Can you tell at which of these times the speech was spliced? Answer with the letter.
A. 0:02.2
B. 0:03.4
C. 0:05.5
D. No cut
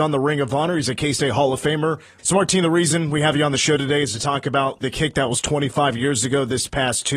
A